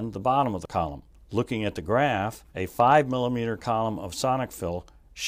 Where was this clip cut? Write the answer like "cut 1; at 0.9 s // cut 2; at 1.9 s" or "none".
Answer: cut 1; at 1.2 s // cut 2; at 2.5 s